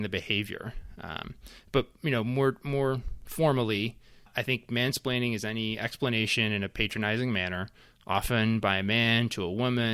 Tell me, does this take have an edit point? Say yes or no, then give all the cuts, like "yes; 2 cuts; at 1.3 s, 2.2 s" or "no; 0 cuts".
no; 0 cuts